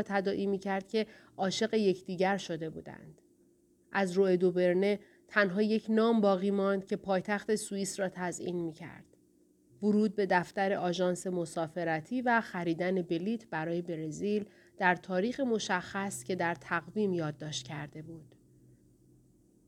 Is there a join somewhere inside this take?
yes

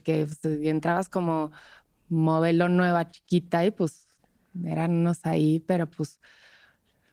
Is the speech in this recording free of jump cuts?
yes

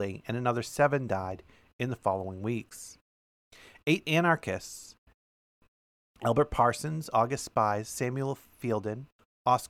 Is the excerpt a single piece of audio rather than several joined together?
yes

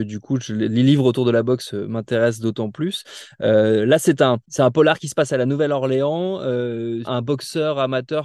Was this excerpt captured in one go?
no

